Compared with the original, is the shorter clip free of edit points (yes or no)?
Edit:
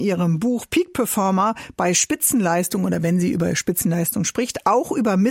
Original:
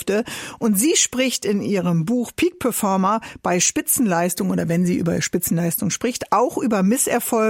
yes